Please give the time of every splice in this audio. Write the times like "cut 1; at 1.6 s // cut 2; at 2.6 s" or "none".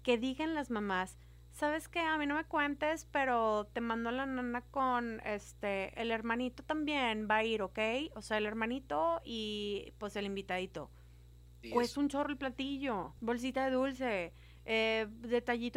cut 1; at 11.6 s // cut 2; at 13.1 s

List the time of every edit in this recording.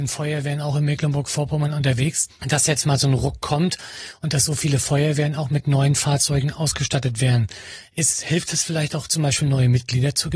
cut 1; at 2.8 s

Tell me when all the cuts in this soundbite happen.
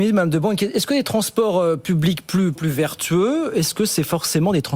cut 1; at 2.5 s

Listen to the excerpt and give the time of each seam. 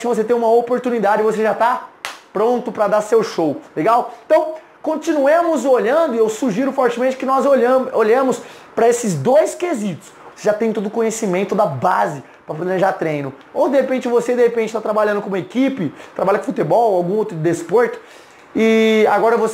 cut 1; at 10.3 s

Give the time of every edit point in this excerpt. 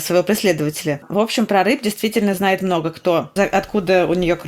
cut 1; at 1.0 s // cut 2; at 3.4 s

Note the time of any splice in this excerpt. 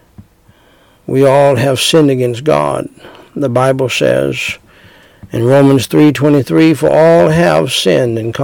none

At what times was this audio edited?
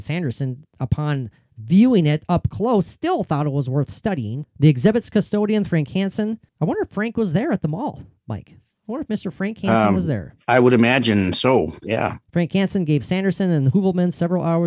cut 1; at 4.4 s // cut 2; at 6.5 s // cut 3; at 12.2 s

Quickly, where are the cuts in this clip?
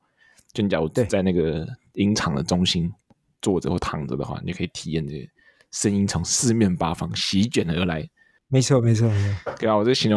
none

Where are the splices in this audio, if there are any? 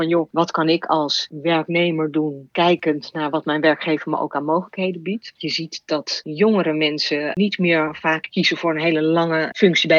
cut 1; at 5.4 s // cut 2; at 7.3 s

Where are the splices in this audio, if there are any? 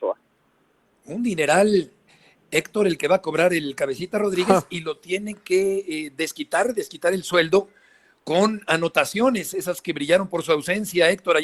none

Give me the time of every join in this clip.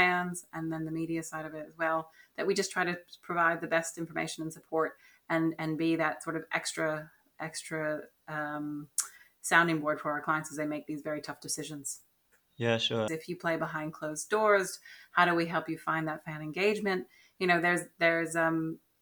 cut 1; at 13.1 s

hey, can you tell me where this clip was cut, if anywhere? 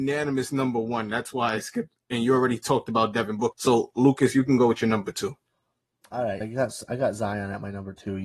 cut 1; at 3.5 s // cut 2; at 6.4 s

